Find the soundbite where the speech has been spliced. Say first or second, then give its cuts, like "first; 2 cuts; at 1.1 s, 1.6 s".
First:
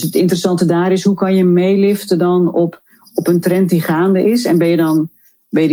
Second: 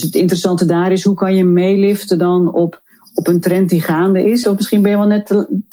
second; 1 cut; at 4.4 s